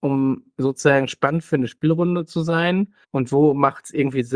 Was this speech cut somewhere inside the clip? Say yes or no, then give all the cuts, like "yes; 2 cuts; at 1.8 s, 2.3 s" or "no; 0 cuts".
yes; 1 cut; at 3.0 s